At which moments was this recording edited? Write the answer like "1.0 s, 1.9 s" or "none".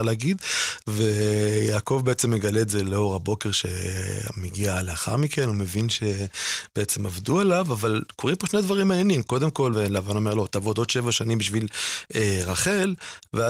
9.7 s